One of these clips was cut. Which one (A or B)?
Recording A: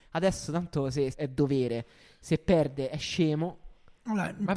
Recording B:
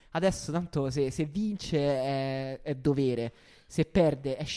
A